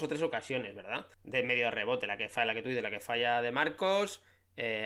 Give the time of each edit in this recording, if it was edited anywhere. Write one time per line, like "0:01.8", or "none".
0:01.1